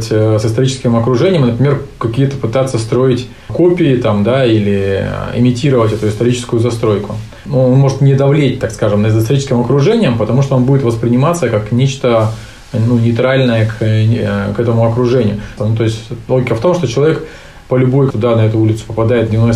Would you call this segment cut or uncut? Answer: cut